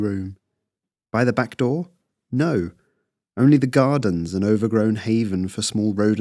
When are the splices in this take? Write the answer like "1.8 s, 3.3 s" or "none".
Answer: none